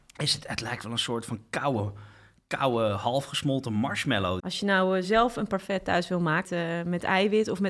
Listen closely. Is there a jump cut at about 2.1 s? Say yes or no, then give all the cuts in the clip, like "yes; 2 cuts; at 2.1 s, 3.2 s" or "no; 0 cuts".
no; 2 cuts; at 4.4 s, 6.4 s